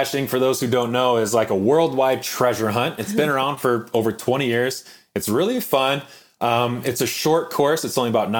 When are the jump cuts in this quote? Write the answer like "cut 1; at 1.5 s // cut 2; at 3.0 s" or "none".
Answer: none